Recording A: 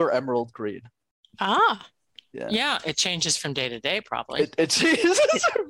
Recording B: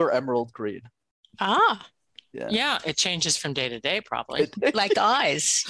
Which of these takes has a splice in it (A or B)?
B